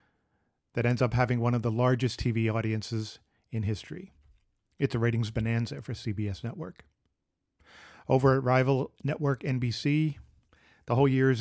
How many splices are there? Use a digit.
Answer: 0